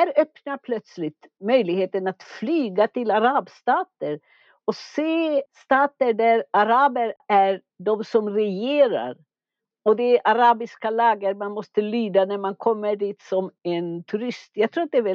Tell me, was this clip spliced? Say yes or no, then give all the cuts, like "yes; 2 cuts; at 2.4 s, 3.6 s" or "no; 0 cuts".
no; 0 cuts